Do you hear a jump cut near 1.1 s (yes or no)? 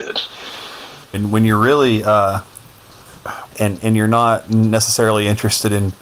yes